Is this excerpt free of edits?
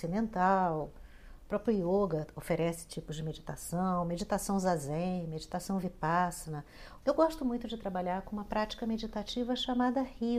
no; 1 cut; at 7.0 s

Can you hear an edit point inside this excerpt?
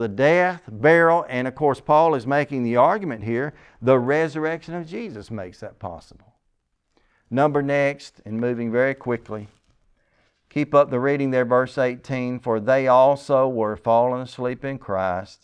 no; 0 cuts

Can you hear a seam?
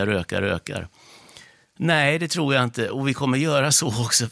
yes; 1 cut; at 1.6 s

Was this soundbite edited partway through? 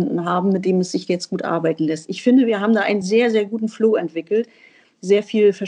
no; 0 cuts

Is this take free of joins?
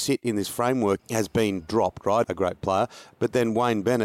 no; 2 cuts; at 1.0 s, 2.2 s

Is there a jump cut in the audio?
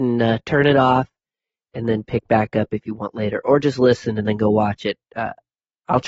no; 0 cuts

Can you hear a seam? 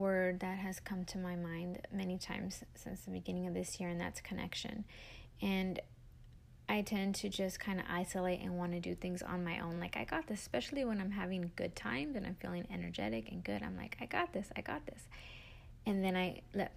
no; 0 cuts

